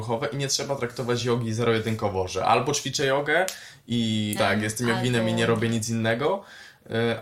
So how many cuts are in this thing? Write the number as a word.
one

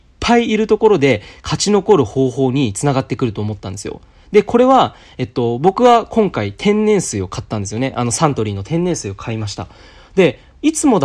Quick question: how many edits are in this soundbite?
zero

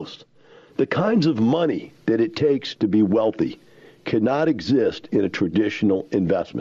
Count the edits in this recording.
one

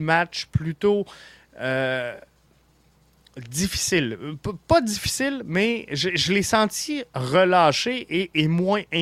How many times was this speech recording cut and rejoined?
zero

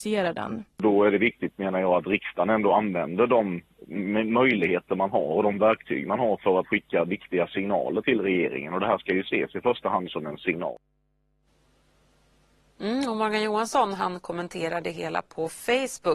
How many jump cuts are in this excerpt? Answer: zero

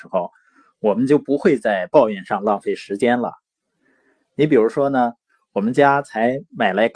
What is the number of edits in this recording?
zero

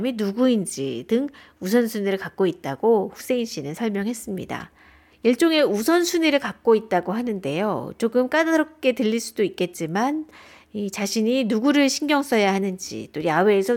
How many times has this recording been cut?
one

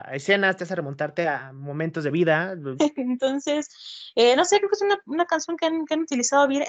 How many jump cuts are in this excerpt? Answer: one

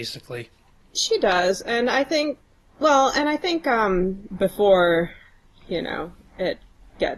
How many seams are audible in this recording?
one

